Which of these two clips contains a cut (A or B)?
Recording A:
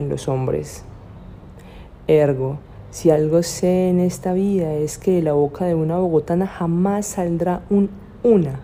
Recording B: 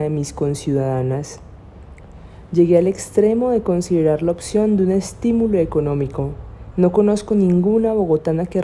B